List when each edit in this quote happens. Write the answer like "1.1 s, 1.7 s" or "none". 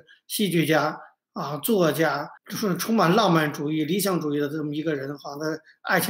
2.4 s

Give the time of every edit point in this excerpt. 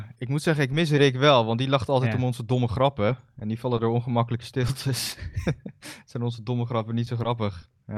none

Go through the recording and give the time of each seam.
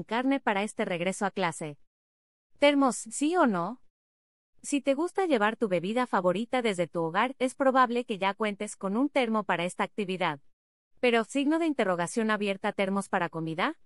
none

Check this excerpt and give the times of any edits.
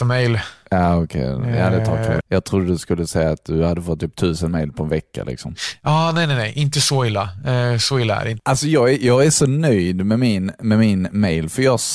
2.2 s

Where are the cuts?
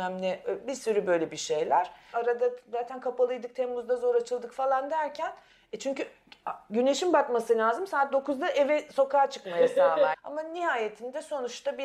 2.1 s, 10.1 s

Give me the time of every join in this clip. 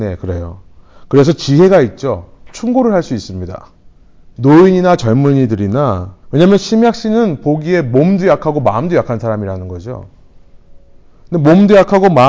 4.2 s, 6.2 s

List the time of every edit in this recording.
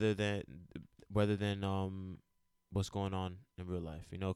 none

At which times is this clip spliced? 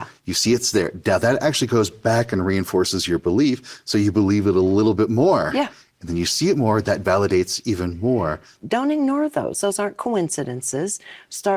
5.8 s, 8.6 s

